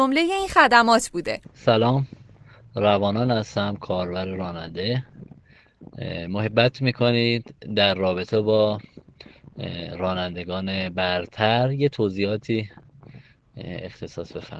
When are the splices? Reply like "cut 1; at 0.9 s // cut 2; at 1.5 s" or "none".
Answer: cut 1; at 1.4 s